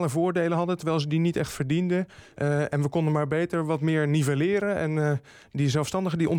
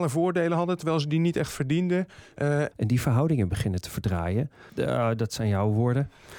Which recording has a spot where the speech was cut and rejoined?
second; 2 cuts; at 2.7 s, 4.7 s

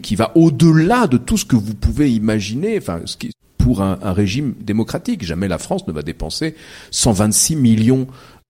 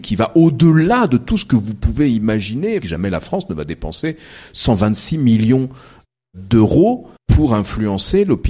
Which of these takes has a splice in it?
second; 2 cuts; at 2.8 s, 7.2 s

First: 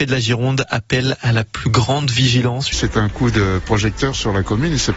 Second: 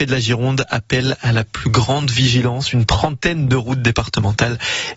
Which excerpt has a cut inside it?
first; 1 cut; at 2.7 s

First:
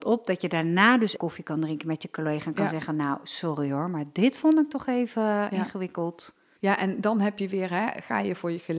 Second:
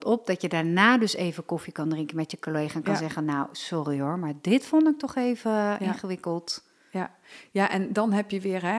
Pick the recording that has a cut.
first; 2 cuts; at 1.2 s, 6.6 s

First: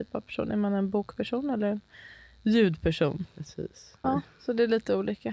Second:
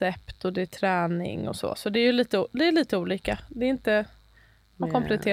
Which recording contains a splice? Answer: first; 1 cut; at 4.0 s

